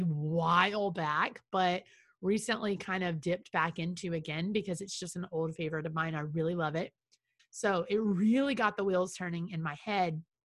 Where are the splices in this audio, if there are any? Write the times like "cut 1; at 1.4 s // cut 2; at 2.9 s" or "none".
cut 1; at 7.4 s